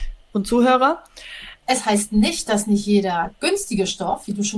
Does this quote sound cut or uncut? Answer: cut